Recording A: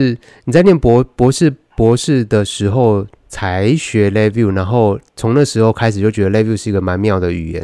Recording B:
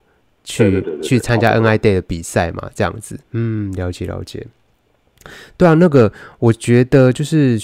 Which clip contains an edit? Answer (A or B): B